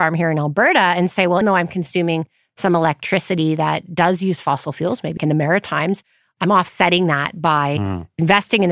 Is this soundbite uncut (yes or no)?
no